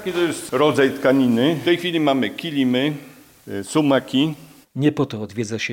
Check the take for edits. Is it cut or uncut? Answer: cut